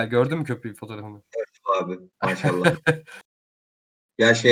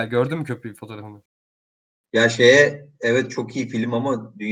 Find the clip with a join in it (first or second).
second